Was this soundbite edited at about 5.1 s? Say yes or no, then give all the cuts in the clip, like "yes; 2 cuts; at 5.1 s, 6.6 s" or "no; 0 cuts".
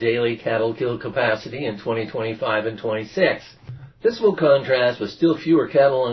no; 0 cuts